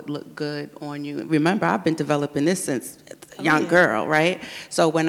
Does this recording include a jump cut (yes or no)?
no